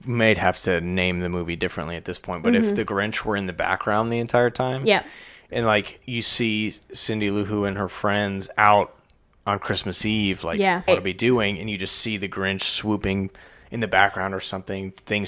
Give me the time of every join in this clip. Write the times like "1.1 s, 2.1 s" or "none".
10.9 s